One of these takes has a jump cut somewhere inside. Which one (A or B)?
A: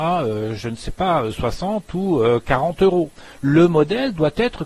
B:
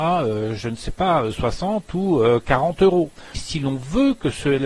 B